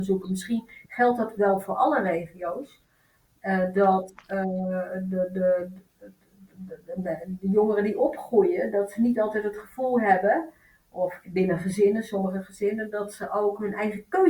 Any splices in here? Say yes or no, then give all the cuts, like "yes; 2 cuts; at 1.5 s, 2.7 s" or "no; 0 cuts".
no; 0 cuts